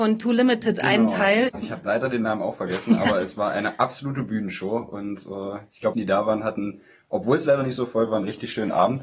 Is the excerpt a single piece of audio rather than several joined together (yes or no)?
no